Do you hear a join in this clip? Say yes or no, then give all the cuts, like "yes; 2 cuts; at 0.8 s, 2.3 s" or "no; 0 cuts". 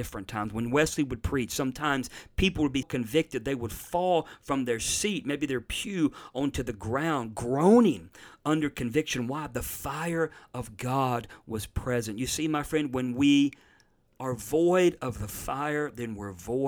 yes; 1 cut; at 2.8 s